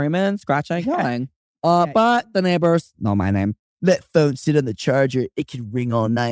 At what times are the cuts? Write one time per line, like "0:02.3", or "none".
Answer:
0:03.6